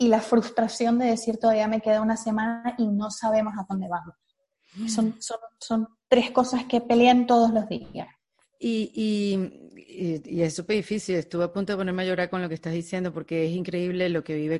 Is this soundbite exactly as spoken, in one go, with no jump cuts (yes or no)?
yes